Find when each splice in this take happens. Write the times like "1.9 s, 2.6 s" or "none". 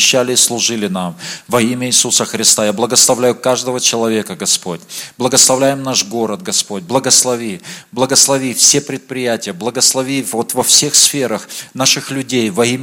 none

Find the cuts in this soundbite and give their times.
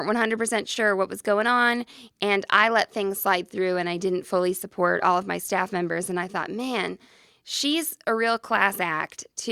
none

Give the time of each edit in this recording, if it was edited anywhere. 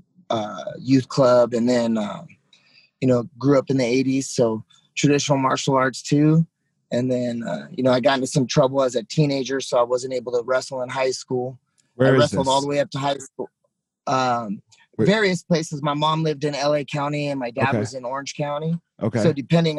none

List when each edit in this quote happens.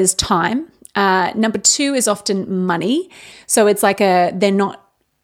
3.3 s

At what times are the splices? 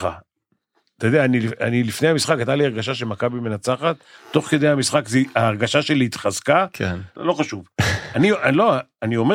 7.2 s

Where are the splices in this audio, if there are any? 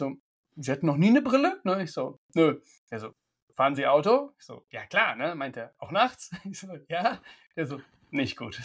none

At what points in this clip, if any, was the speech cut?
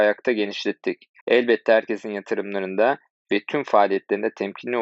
1.2 s

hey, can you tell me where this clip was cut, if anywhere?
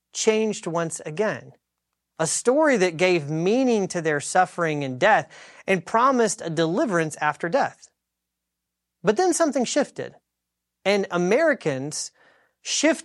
2.0 s

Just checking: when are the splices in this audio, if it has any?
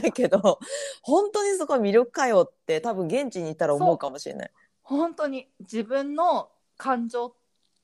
6.6 s

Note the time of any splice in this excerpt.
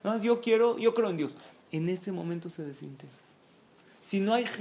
1.5 s

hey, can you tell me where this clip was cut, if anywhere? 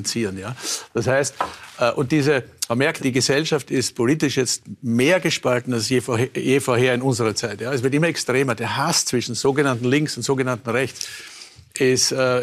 3.0 s

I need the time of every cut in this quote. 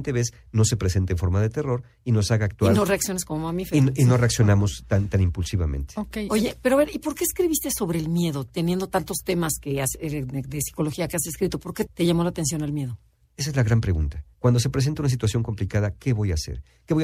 11.9 s, 13.2 s, 14.3 s

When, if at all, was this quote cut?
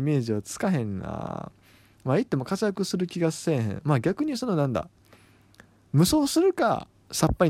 none

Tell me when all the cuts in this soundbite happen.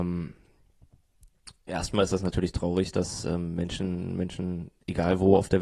none

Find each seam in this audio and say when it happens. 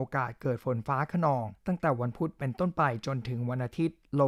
1.6 s

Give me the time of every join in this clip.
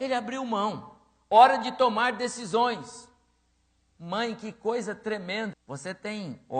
5.5 s

